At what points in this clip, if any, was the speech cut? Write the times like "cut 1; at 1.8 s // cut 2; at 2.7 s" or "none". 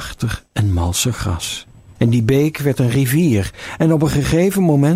cut 1; at 2.0 s